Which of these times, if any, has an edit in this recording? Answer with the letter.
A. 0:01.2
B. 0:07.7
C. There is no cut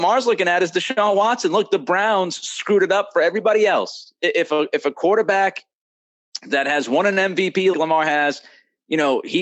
B